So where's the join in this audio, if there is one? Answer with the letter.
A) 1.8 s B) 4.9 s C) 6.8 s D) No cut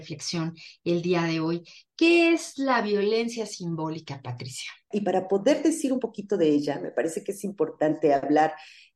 B